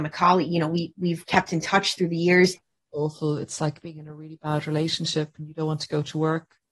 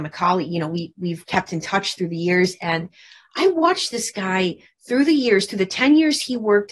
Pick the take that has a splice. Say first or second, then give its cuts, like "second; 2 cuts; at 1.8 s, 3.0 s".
first; 1 cut; at 2.6 s